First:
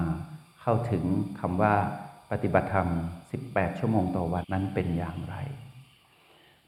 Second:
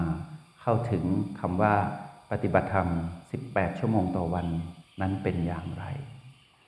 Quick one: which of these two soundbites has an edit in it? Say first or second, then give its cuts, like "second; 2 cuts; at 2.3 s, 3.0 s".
first; 1 cut; at 4.4 s